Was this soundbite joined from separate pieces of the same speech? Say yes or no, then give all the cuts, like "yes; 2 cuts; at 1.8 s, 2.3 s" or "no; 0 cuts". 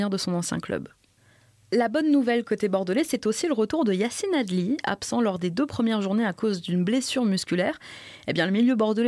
no; 0 cuts